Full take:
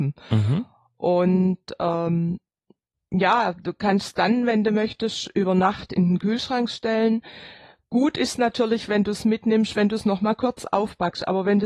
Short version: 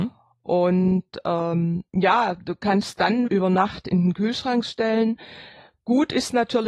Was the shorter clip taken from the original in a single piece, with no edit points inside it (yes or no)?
no